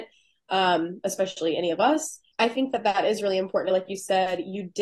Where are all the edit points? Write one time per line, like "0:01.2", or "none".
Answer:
0:02.3